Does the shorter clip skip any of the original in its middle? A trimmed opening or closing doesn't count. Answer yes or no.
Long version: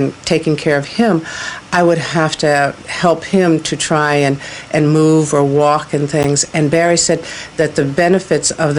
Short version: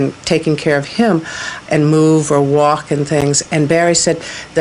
yes